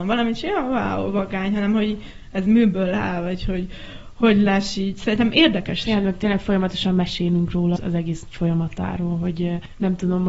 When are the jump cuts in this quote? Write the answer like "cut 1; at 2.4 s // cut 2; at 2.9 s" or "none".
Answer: cut 1; at 5.8 s // cut 2; at 7.8 s

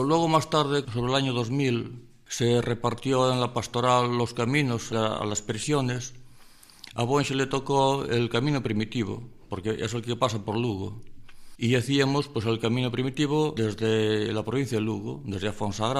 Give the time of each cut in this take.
cut 1; at 11.5 s

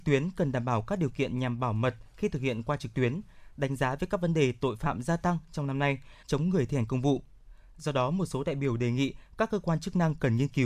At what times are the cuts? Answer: cut 1; at 6.2 s

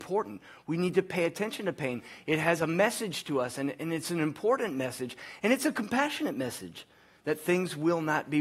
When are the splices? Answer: none

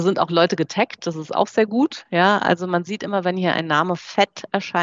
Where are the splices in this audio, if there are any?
none

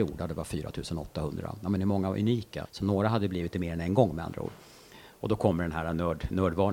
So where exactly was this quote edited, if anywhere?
cut 1; at 2.6 s

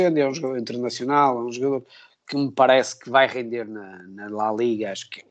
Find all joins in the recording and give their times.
none

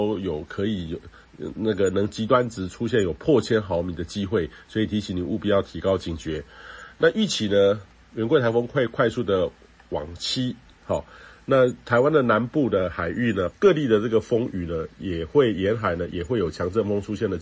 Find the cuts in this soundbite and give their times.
cut 1; at 13.5 s

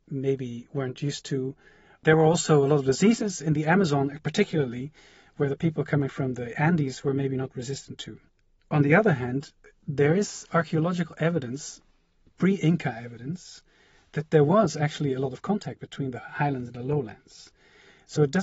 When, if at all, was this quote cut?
none

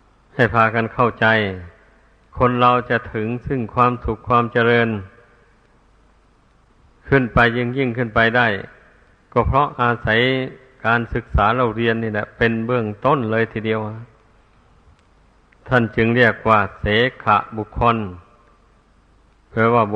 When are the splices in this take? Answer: none

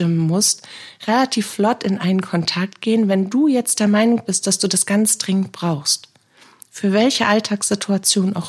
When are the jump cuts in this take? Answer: none

